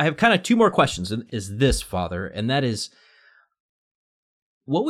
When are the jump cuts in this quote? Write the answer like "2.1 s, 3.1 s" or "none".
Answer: 1.3 s